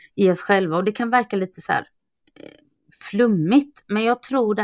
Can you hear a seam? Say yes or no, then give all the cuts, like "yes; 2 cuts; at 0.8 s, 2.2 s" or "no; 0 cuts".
no; 0 cuts